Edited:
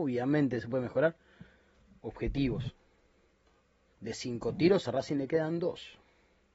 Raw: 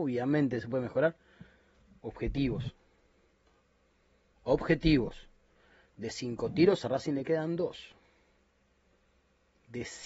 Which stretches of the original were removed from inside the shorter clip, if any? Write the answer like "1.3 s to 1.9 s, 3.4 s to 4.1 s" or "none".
3.9 s to 5.9 s